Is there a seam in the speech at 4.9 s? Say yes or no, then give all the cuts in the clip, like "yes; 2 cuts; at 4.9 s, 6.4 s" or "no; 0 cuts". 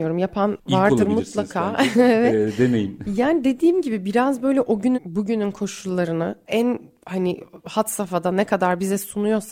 yes; 1 cut; at 4.9 s